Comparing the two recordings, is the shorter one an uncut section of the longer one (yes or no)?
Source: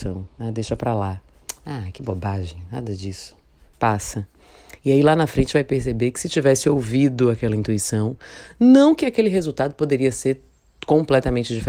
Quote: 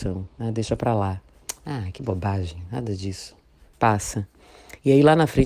yes